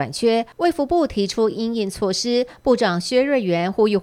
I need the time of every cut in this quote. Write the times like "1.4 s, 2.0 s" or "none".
none